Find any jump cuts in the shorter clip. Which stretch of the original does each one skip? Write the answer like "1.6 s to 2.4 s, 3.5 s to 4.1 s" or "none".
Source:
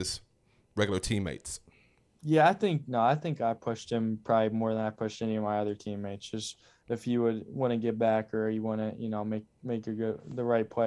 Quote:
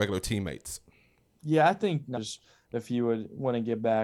2.9 s to 6.3 s